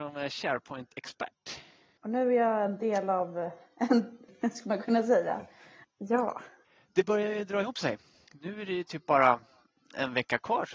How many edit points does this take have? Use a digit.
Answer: 2